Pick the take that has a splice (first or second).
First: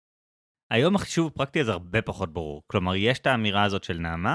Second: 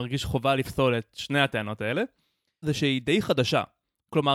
second